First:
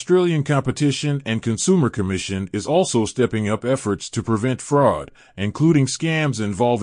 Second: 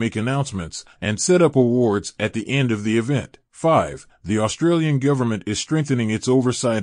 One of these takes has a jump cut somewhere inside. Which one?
second; 2 cuts; at 0.9 s, 3.5 s

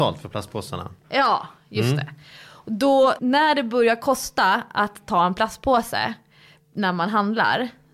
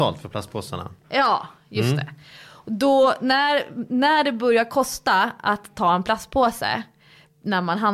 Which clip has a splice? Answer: first; 1 cut; at 3.2 s

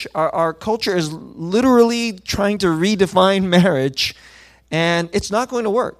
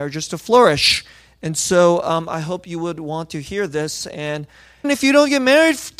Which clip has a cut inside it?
second; 1 cut; at 4.8 s

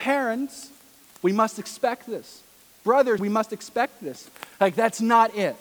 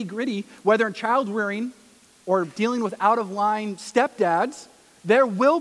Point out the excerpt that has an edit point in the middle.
first; 2 cuts; at 3.2 s, 4.5 s

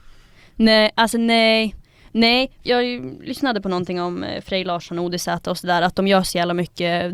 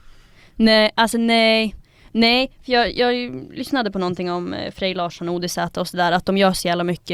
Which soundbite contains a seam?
first; 1 cut; at 2.6 s

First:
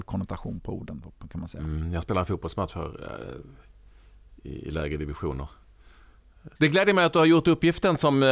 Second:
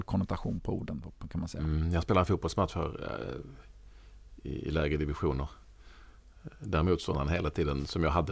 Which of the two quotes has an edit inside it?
first; 1 cut; at 6.6 s

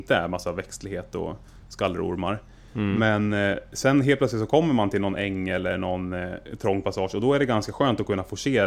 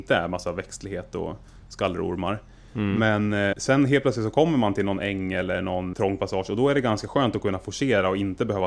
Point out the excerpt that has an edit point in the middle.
second; 2 cuts; at 3.5 s, 5.9 s

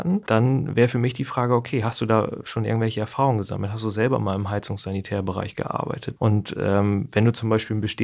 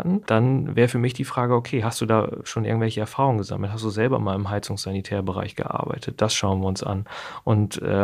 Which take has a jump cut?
first; 1 cut; at 6.2 s

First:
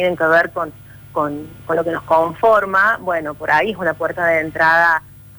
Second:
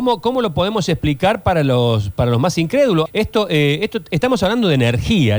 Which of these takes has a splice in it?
second; 1 cut; at 3.1 s

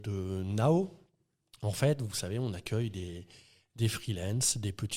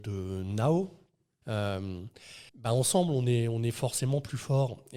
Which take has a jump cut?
second; 2 cuts; at 1.4 s, 2.5 s

